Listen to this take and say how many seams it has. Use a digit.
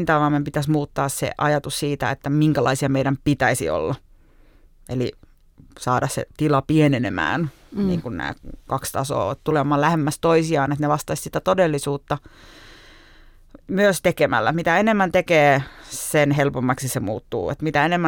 0